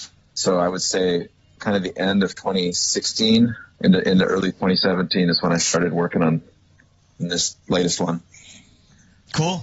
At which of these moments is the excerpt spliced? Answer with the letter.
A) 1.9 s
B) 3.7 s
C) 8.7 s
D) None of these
B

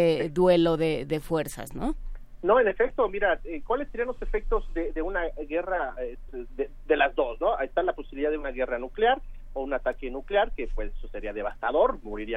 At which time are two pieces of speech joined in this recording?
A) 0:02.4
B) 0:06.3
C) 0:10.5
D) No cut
B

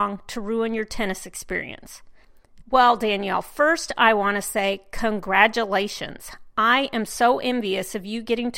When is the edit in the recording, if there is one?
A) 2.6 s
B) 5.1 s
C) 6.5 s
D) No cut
A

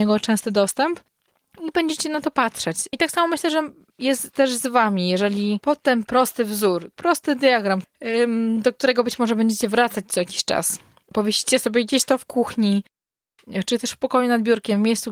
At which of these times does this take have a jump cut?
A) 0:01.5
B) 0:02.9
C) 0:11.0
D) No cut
B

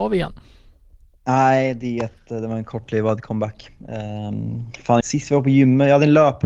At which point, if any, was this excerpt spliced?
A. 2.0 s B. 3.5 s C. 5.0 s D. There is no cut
C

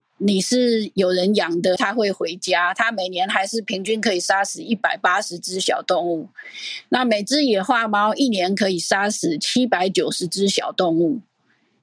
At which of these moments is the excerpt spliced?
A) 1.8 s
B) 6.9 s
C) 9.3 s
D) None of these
A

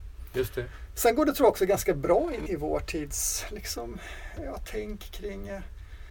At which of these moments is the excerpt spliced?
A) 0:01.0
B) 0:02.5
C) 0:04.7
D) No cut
B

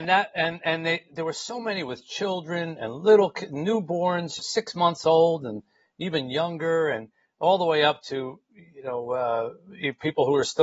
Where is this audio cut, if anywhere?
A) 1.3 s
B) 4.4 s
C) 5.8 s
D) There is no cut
B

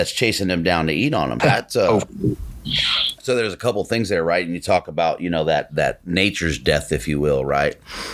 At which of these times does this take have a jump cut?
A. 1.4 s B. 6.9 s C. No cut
A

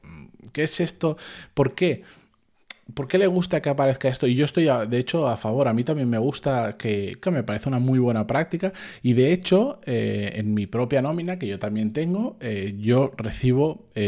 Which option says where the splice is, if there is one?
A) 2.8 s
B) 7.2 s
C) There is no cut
B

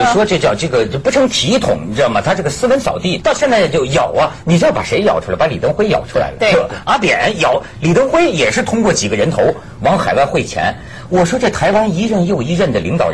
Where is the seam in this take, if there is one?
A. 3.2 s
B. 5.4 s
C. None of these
A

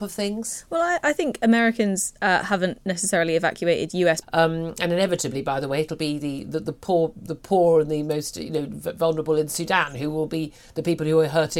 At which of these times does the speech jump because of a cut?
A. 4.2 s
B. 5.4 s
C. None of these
A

